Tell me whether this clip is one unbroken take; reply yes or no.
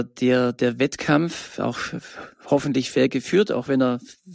yes